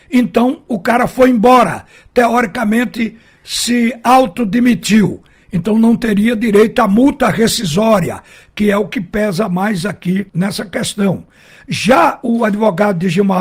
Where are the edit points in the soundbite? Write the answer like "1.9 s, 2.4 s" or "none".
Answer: 10.3 s